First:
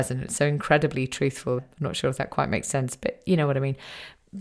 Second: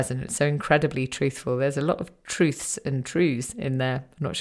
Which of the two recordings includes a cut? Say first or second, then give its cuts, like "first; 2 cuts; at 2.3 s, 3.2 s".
first; 1 cut; at 1.6 s